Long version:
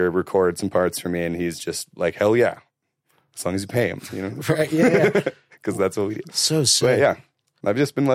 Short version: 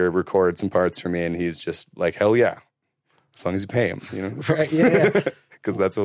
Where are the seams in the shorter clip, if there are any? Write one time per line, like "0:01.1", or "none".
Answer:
none